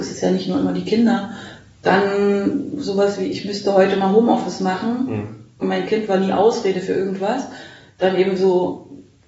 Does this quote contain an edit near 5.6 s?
yes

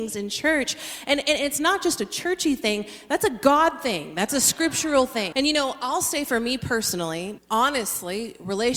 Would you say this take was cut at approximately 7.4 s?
yes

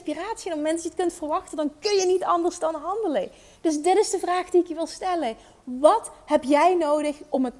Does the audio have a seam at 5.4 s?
no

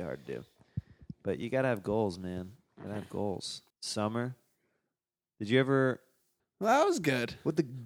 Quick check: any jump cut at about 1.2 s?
no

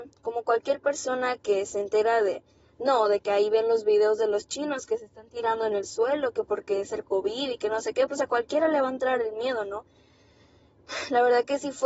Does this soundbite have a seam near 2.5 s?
no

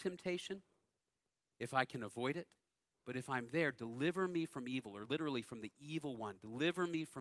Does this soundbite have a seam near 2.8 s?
no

